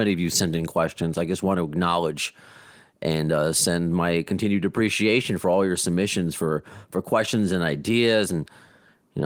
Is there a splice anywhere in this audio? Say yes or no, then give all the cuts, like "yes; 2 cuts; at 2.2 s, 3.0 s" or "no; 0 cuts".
no; 0 cuts